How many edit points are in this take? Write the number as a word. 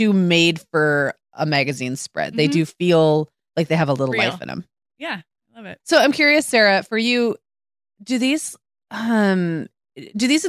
one